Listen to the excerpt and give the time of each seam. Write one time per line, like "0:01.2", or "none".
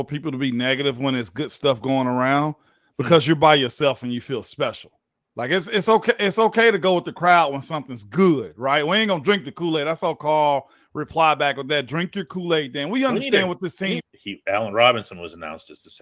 0:14.0

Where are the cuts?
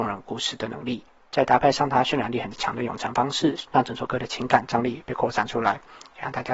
0:03.7

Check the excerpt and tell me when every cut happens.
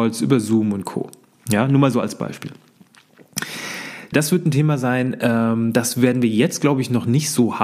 0:04.1

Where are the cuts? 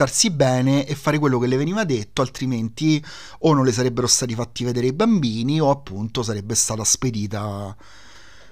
none

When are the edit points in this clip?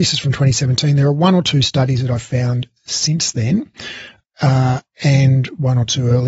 0:04.2

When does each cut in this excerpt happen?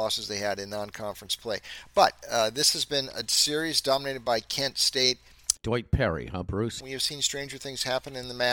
0:05.6
0:06.8

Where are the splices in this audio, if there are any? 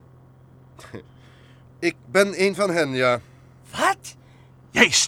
0:01.7

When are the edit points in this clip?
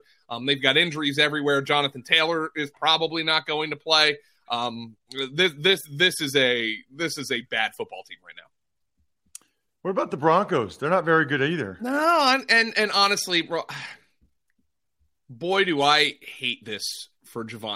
none

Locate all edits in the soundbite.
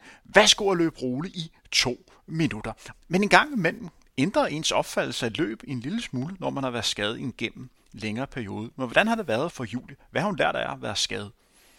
0:02.9
0:09.5

